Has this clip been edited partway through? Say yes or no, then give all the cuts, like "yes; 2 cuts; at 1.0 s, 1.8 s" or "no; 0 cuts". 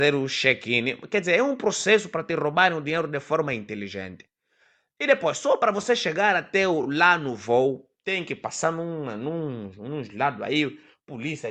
no; 0 cuts